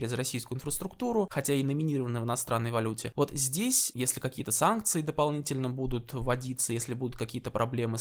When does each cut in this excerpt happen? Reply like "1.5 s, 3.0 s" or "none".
none